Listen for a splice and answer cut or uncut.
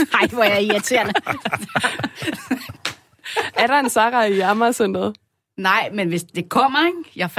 uncut